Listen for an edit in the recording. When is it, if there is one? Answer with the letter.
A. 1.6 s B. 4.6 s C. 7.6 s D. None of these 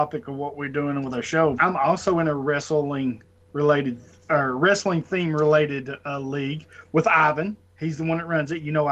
A